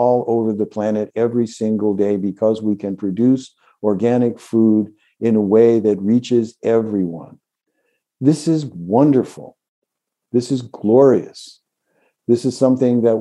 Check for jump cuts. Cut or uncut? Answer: uncut